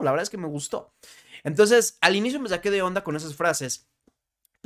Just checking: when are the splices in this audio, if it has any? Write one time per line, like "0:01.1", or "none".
none